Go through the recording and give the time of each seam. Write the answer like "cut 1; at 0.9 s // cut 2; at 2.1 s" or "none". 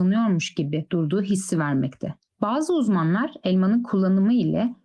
cut 1; at 2.3 s

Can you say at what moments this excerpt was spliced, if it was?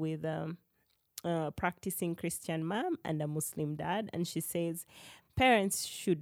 none

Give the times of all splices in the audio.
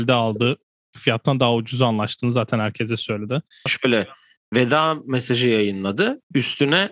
cut 1; at 3.7 s

